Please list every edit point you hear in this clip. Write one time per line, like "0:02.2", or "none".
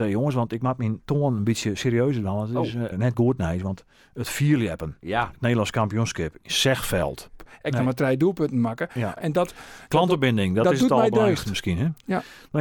0:02.9
0:07.4
0:09.2